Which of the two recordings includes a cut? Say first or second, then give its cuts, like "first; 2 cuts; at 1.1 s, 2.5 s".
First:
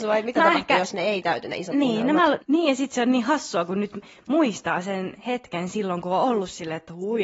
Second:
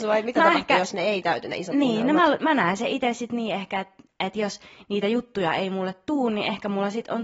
first; 1 cut; at 2.4 s